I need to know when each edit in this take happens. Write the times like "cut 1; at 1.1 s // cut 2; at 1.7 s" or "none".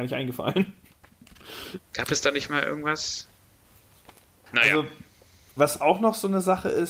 cut 1; at 1.8 s // cut 2; at 4.5 s